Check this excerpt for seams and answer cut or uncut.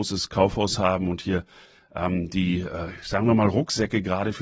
uncut